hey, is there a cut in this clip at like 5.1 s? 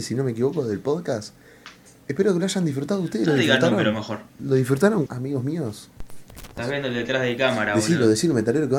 yes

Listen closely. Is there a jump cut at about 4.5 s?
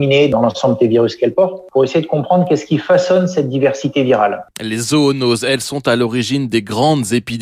yes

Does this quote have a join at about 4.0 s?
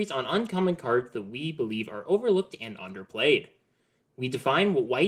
yes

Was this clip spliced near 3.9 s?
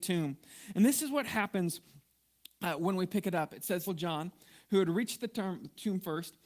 yes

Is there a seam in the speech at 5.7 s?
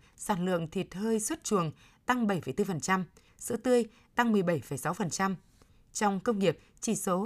no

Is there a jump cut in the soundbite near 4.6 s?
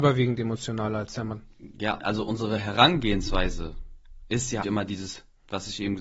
yes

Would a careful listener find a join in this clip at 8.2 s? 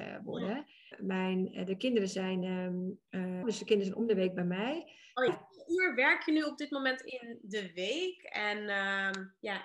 no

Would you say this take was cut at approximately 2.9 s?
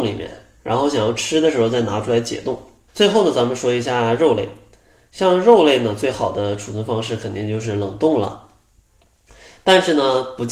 yes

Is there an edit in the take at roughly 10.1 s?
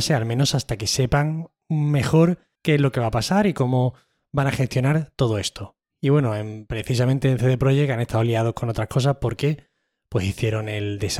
no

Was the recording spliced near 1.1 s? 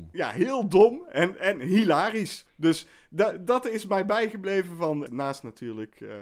no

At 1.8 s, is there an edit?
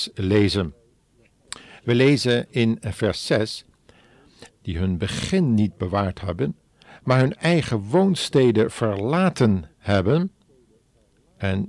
no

